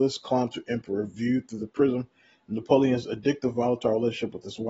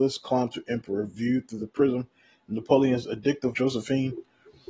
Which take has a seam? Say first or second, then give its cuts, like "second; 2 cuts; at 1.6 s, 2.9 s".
second; 1 cut; at 3.5 s